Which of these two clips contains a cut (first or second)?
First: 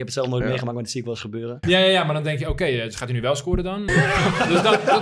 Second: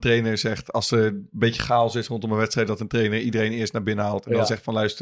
first